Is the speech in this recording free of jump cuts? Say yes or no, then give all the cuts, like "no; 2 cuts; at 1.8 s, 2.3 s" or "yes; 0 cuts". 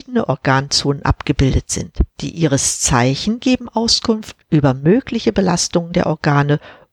no; 1 cut; at 2.1 s